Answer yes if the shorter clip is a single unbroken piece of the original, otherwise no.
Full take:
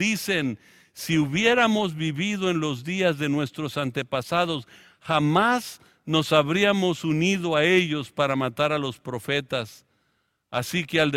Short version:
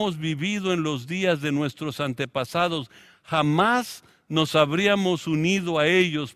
yes